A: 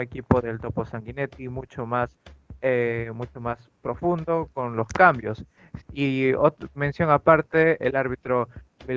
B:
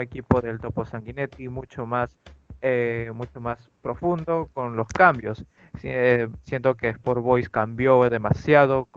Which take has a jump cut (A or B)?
A